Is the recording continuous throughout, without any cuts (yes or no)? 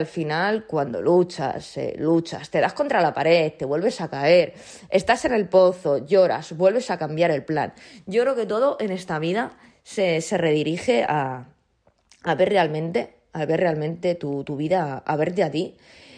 yes